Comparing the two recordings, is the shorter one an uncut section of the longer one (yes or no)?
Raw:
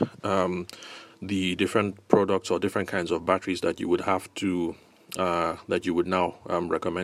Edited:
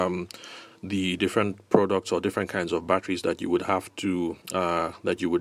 no